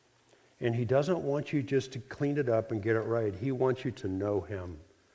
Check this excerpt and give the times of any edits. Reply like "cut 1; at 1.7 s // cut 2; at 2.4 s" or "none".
none

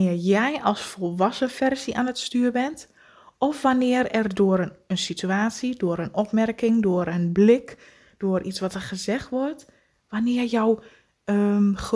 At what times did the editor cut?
none

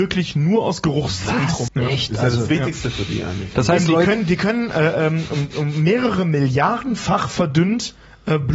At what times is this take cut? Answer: cut 1; at 1.7 s // cut 2; at 3.5 s

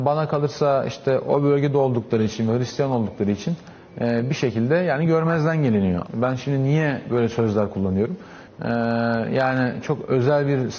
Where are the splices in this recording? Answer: cut 1; at 6.1 s // cut 2; at 8.5 s

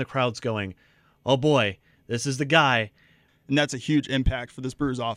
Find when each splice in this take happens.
cut 1; at 3.3 s

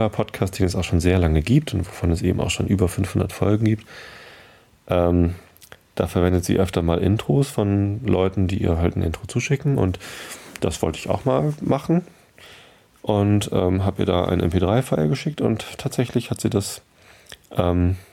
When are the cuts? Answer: none

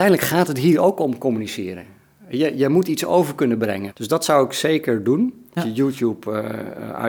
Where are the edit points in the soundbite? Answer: cut 1; at 3.9 s // cut 2; at 5.6 s

